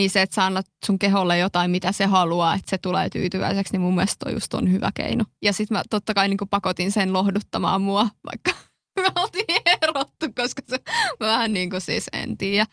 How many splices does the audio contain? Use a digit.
1